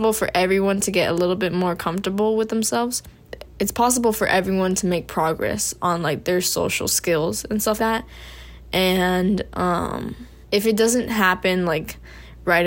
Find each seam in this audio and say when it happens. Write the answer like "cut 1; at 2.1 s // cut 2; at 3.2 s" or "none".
cut 1; at 7.8 s // cut 2; at 10.4 s